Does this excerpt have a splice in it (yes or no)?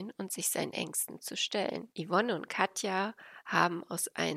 yes